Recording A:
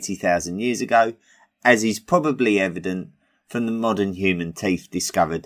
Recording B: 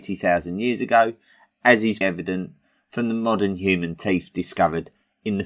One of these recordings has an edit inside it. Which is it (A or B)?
B